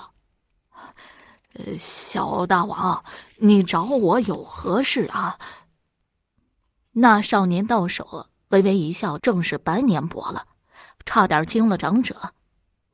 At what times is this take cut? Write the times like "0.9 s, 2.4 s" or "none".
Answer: 9.2 s